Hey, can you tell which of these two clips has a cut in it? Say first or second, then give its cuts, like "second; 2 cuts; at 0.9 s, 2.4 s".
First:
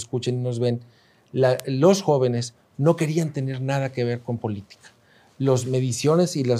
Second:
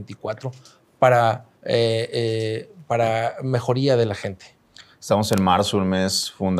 second; 1 cut; at 1.5 s